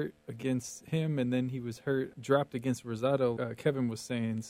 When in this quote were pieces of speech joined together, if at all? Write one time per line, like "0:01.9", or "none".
0:02.1
0:03.4